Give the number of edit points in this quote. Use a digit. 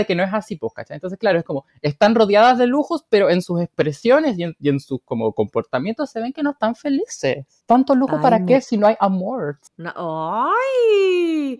1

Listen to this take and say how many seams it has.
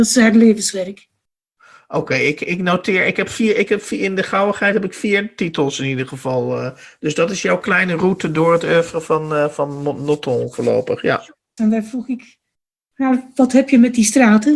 1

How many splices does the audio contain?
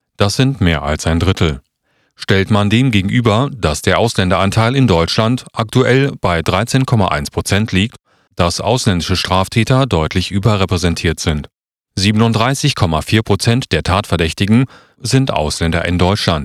2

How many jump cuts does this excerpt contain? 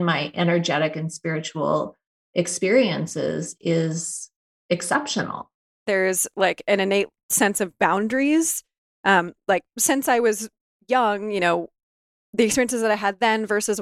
1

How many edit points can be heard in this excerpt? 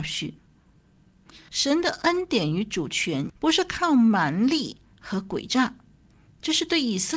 2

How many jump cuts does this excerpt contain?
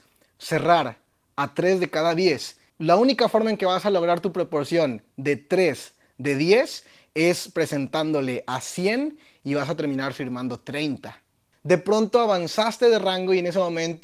2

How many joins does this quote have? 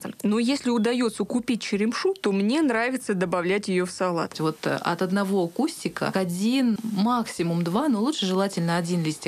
2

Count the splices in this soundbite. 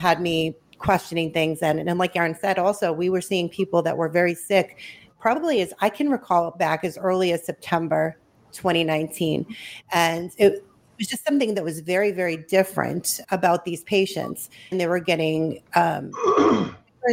2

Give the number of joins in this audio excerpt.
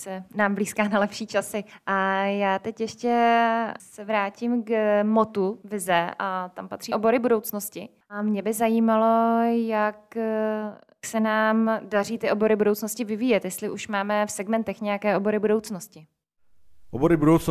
0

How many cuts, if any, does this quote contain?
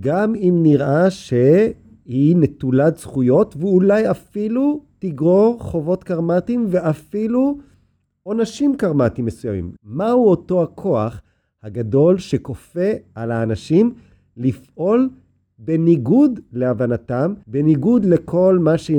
2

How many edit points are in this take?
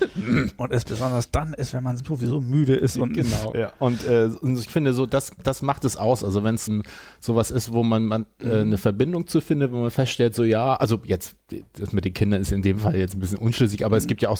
2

